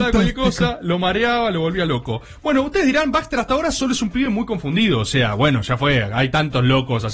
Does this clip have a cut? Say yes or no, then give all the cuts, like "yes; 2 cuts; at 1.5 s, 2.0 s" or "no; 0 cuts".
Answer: no; 0 cuts